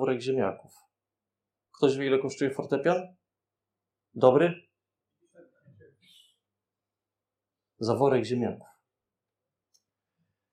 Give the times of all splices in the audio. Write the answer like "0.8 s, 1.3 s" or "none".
none